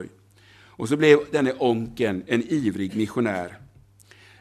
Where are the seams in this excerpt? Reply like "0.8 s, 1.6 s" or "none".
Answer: none